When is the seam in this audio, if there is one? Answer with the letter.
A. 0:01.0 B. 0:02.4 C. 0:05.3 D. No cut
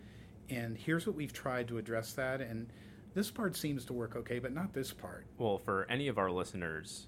C